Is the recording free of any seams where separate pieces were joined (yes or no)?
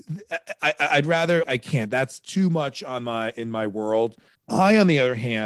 no